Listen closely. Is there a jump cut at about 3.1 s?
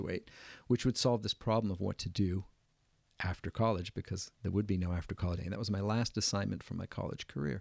no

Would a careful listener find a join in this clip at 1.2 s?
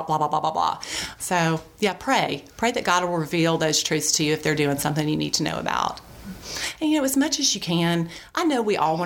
yes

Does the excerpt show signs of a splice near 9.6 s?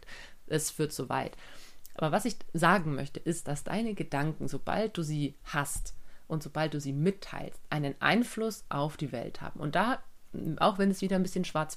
no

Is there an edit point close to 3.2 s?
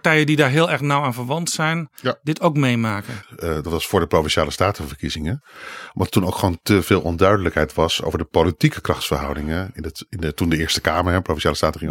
yes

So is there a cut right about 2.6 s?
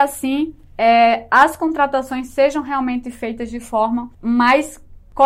no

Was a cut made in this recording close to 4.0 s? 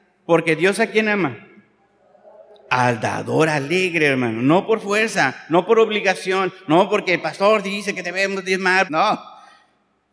no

